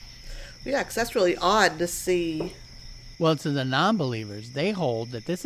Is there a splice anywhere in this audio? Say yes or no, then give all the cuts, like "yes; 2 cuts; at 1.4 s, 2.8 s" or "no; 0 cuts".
yes; 1 cut; at 3.1 s